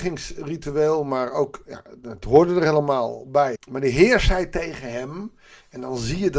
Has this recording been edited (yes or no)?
yes